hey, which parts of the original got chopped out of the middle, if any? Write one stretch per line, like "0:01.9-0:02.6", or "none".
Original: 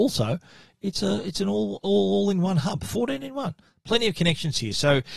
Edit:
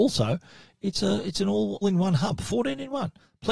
0:01.8-0:02.2